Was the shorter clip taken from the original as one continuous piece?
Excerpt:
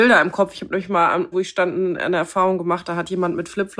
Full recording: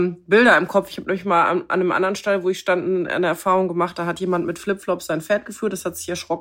no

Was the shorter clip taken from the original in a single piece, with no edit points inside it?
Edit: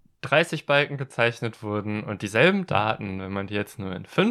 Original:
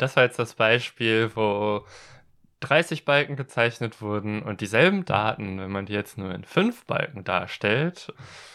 yes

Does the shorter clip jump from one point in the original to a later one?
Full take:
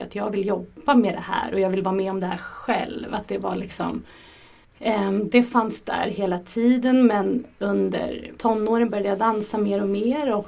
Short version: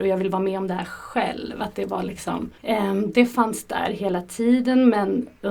yes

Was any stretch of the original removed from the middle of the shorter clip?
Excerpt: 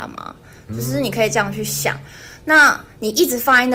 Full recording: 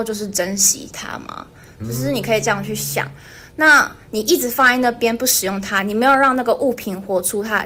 no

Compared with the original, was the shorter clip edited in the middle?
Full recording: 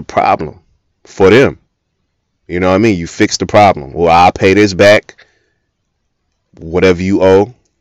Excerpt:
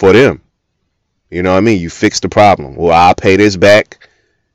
no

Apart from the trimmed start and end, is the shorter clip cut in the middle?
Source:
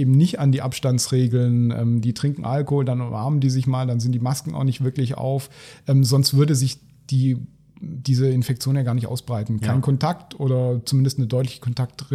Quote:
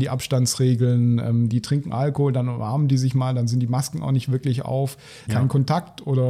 yes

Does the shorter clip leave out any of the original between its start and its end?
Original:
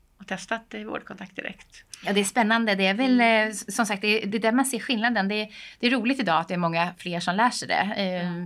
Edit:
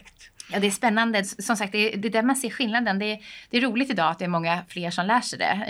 yes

